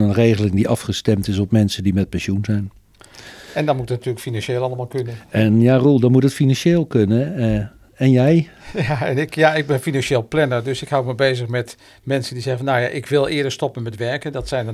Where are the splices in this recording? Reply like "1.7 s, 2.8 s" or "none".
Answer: none